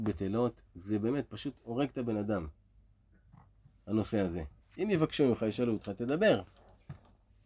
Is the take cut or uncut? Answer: cut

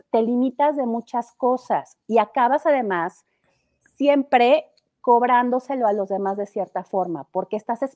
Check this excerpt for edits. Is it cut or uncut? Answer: uncut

